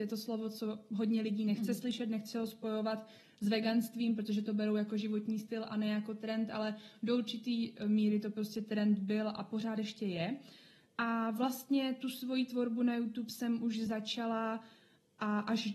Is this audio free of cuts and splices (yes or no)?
yes